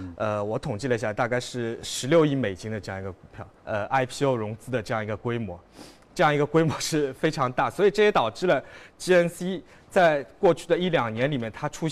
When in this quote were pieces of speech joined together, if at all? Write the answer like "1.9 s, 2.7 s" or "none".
3.6 s